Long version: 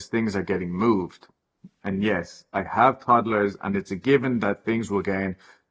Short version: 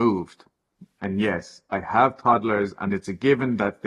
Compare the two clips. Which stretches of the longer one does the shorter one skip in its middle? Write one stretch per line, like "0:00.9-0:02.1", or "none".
none